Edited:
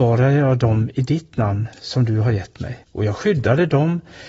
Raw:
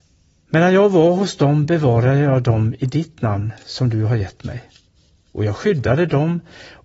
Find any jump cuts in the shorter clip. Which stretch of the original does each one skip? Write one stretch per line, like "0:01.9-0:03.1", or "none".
0:04.7-0:05.2

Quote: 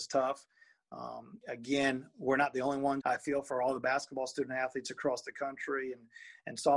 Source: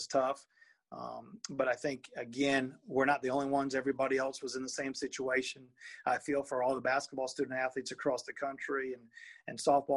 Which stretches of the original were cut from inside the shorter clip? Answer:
0:01.4-0:02.1
0:03.7-0:06.0

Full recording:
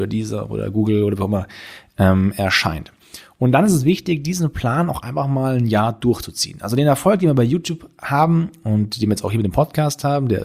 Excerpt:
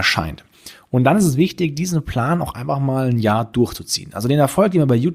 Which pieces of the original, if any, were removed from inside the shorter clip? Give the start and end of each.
none

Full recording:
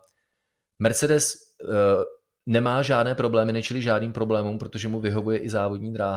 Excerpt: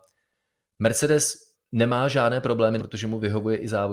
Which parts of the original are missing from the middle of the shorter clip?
0:01.5-0:02.3
0:03.5-0:04.6

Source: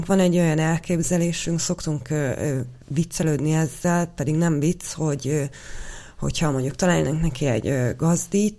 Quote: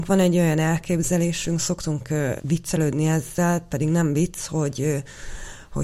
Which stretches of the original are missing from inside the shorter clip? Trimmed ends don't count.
0:02.4-0:02.8

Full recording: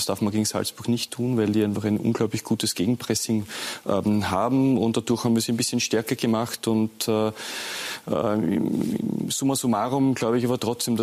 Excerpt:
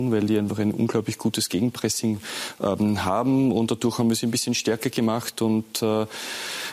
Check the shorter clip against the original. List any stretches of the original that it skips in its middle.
none

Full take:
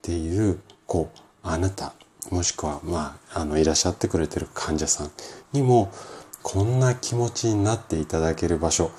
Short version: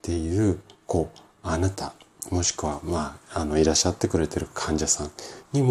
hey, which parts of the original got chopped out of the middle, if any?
none

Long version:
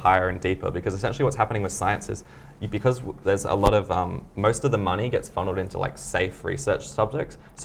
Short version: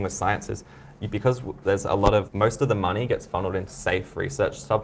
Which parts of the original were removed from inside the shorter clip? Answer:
0:03.9-0:04.3
0:05.7-0:05.9

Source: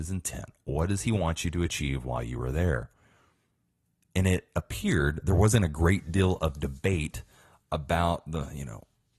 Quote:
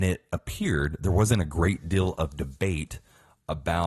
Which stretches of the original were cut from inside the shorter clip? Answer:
none

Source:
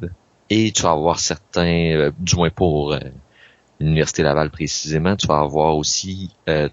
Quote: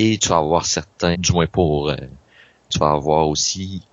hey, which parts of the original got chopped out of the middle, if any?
0:01.7-0:02.2
0:03.7-0:05.2

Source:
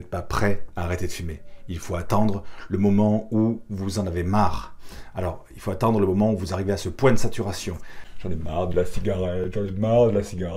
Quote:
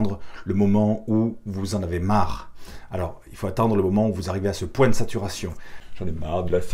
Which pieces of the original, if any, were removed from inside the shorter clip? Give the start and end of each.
none

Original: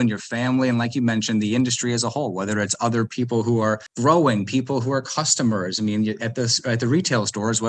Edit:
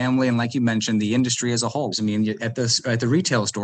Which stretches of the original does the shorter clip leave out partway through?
0:02.3-0:05.7

